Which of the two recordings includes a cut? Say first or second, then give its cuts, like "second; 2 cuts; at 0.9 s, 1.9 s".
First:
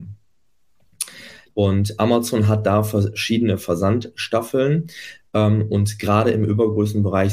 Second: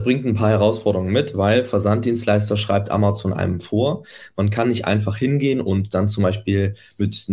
first; 1 cut; at 1.5 s